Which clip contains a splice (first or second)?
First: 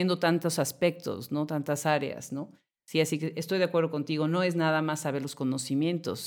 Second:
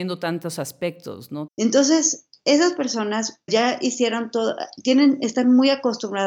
second